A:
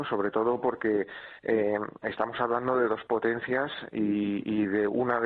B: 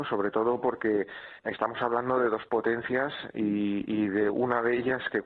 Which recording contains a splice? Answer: B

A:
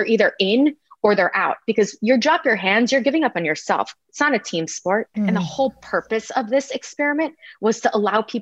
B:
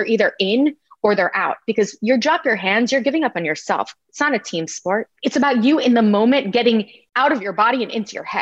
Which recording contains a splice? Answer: A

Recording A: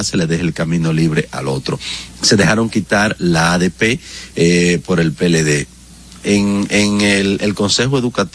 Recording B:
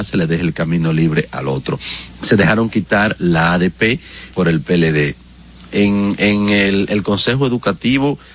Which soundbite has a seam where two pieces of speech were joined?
B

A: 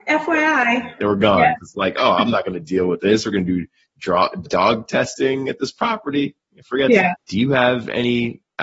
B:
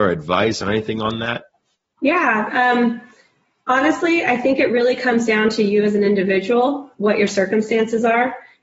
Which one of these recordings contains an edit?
A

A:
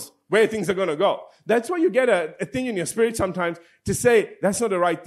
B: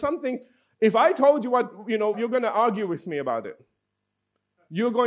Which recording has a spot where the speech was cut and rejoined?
B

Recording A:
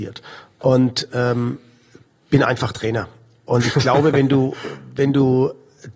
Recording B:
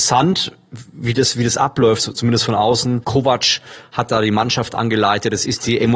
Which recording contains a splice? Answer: B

